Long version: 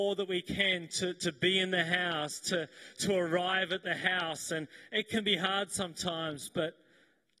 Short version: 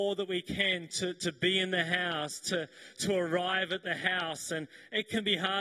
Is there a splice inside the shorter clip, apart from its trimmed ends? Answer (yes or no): no